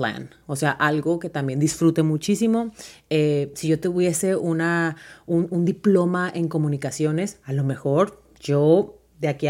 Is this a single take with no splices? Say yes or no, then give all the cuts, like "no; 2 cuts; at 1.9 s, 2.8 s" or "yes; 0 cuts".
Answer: yes; 0 cuts